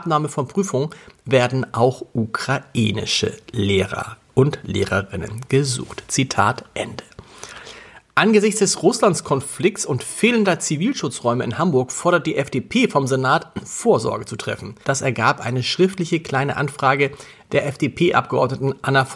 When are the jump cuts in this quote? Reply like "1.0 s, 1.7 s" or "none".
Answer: 14.8 s